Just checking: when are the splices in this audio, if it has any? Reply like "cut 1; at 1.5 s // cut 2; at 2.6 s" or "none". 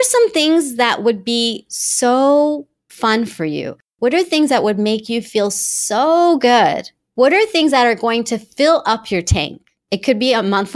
none